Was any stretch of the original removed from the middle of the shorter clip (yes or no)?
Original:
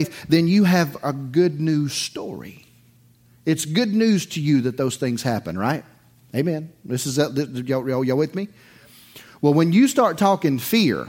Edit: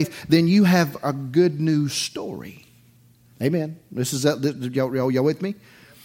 yes